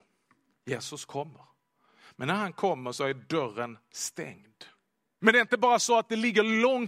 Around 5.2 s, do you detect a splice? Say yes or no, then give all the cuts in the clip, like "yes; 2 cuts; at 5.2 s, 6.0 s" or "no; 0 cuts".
yes; 1 cut; at 5.2 s